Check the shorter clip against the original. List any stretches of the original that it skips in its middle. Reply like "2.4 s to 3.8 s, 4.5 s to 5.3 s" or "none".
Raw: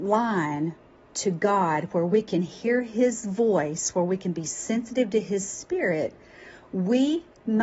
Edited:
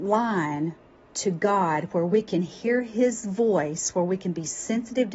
none